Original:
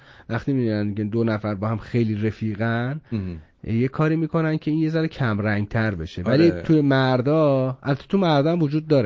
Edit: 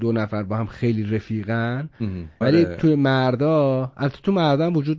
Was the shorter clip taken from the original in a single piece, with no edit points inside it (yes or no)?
no